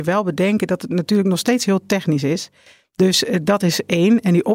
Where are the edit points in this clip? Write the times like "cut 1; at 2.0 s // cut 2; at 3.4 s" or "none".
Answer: cut 1; at 2.8 s